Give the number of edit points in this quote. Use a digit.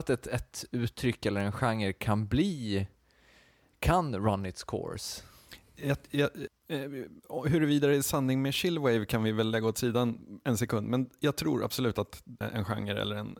2